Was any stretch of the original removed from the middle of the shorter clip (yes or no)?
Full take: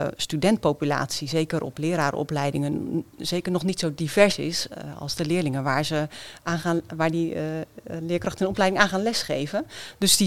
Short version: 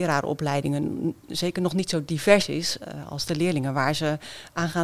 no